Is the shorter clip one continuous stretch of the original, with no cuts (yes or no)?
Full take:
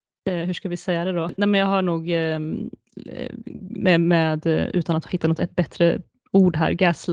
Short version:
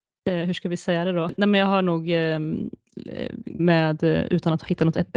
no